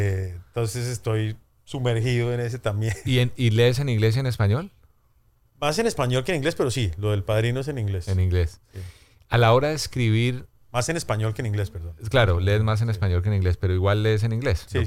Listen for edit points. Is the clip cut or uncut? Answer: uncut